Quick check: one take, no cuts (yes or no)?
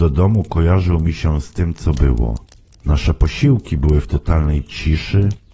no